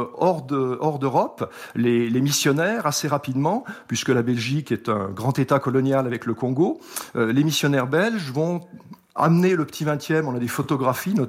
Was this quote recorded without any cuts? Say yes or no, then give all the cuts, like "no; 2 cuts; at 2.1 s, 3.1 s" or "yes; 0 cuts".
yes; 0 cuts